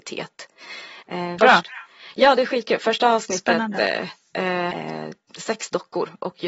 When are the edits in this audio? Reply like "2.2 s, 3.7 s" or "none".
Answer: 1.4 s, 4.7 s